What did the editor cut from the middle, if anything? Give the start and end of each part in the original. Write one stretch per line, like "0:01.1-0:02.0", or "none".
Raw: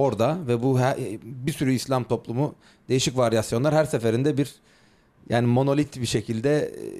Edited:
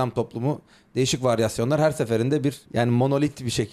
0:04.6-0:05.2